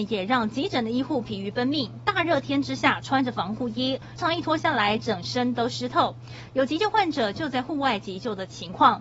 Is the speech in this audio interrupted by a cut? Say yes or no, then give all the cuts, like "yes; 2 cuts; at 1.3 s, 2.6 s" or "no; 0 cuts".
yes; 2 cuts; at 4.2 s, 6.5 s